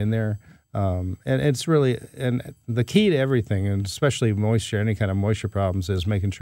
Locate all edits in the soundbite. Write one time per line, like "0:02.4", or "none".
none